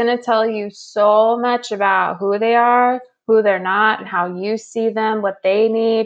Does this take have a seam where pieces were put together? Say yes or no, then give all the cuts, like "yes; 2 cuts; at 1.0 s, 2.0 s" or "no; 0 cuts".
yes; 1 cut; at 4.1 s